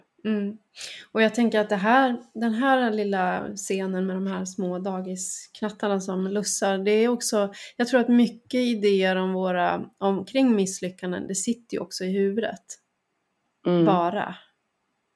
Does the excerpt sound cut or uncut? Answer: uncut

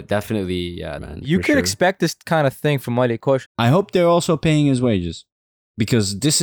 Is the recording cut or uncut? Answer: cut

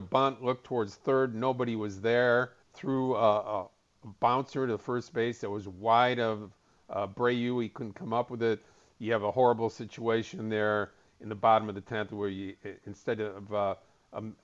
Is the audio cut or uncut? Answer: cut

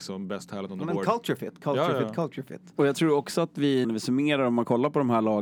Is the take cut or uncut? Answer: cut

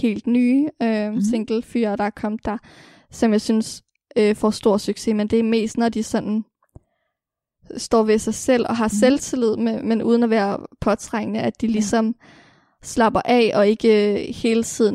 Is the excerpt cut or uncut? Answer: uncut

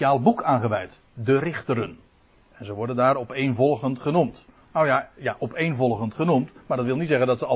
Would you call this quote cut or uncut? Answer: uncut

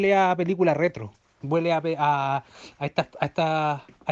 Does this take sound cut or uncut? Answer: uncut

